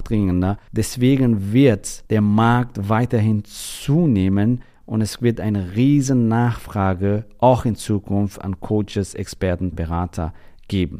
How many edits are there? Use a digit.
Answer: 1